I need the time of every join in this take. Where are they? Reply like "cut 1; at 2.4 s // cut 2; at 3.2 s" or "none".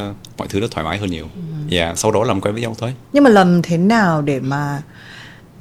cut 1; at 2.0 s // cut 2; at 3.0 s